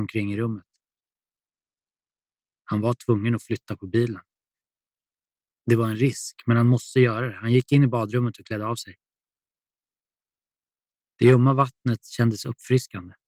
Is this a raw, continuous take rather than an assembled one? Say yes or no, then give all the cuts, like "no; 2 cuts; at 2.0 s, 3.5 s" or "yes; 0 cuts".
yes; 0 cuts